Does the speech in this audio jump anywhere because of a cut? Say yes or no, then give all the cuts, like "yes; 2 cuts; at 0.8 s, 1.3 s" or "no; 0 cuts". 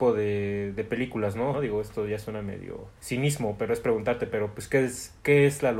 yes; 2 cuts; at 1.5 s, 3.0 s